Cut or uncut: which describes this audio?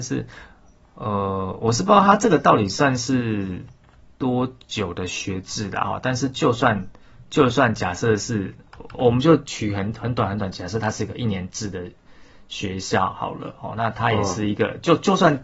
uncut